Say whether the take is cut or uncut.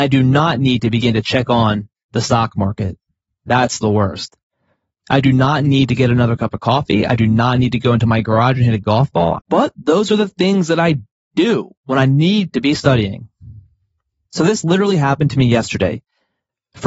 cut